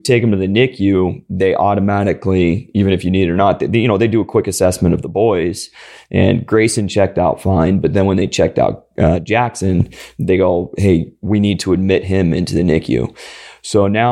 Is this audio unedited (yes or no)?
yes